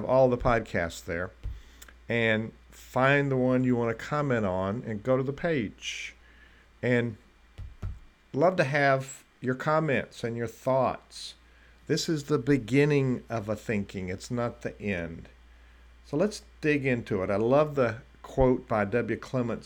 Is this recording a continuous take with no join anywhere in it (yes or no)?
yes